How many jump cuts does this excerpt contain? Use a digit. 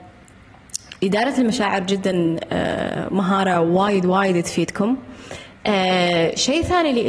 0